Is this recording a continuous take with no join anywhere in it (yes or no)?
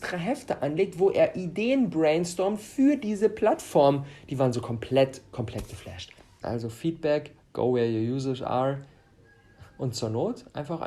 no